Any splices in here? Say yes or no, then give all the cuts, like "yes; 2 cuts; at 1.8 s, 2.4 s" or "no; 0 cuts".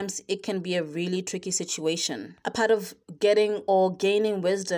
no; 0 cuts